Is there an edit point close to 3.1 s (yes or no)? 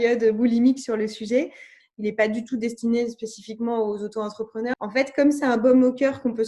no